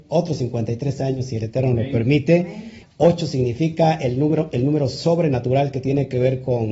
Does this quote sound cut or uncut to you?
cut